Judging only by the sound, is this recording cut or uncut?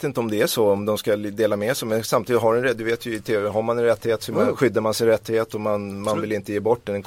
uncut